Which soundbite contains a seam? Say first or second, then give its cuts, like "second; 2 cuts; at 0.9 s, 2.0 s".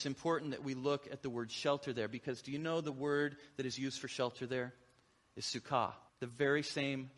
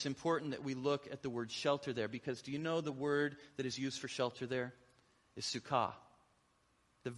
first; 1 cut; at 6.1 s